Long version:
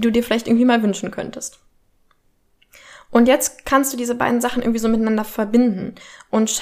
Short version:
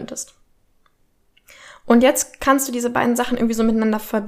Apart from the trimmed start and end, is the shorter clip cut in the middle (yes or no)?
no